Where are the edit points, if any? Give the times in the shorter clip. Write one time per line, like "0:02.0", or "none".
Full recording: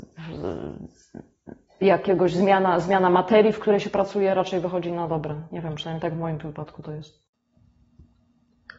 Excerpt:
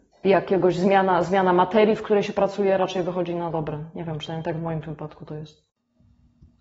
none